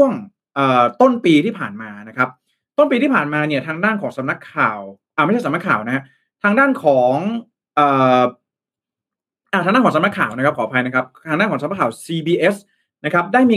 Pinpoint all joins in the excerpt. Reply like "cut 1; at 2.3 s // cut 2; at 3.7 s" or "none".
none